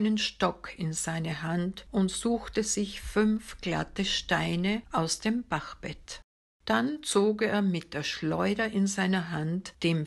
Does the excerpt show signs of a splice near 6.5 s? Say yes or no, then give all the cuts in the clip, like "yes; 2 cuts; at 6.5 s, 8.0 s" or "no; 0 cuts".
yes; 1 cut; at 6.5 s